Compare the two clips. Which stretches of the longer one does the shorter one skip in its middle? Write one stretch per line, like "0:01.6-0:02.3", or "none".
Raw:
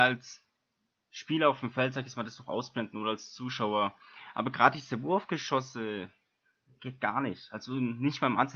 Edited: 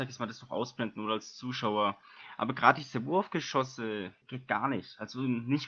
0:06.2-0:06.7